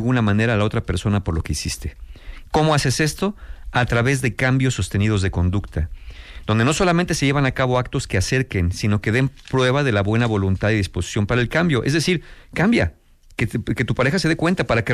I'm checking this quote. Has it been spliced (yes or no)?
no